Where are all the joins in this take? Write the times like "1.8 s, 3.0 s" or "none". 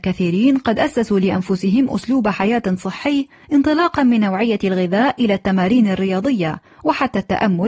none